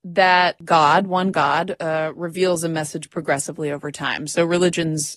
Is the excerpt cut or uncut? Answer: uncut